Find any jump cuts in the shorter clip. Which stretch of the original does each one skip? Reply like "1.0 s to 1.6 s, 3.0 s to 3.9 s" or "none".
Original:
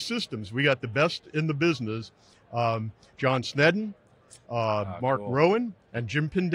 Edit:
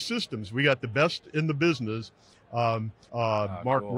3.1 s to 4.4 s